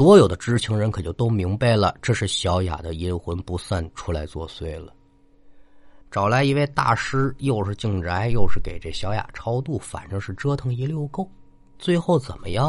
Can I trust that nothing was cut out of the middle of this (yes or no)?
no